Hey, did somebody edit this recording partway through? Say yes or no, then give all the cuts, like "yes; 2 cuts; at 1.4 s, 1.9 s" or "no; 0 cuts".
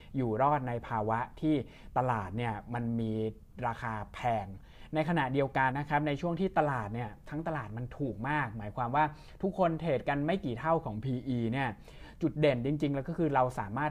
yes; 1 cut; at 5.7 s